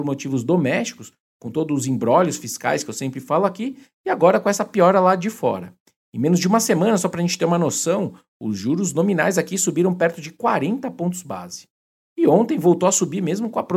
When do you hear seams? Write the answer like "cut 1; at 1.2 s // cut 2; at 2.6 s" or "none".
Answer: none